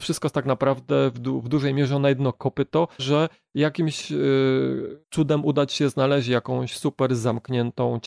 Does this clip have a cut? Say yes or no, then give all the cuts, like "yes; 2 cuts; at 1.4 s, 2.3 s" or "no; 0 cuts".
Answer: yes; 2 cuts; at 3.0 s, 5.0 s